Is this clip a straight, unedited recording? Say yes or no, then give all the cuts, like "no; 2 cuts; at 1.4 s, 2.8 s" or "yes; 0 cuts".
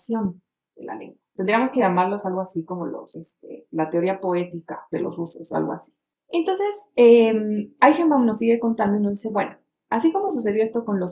yes; 0 cuts